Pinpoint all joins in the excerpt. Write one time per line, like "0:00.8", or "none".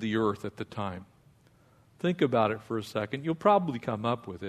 none